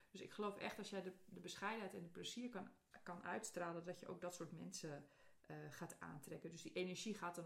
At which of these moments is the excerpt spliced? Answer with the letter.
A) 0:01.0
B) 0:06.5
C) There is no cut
C